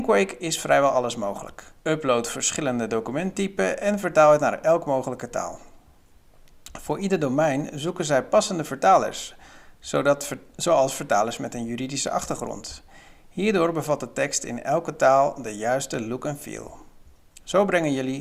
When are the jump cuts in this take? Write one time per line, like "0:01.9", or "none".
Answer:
0:01.8